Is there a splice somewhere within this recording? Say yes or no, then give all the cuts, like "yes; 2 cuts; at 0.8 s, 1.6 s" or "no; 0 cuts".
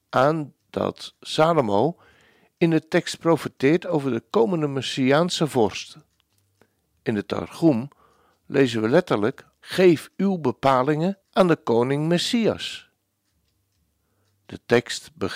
yes; 2 cuts; at 9.6 s, 11.2 s